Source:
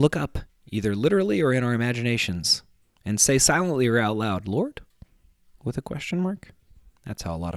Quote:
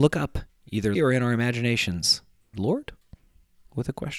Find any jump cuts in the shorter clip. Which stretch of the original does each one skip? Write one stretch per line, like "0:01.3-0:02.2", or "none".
0:01.0-0:01.4
0:02.9-0:04.4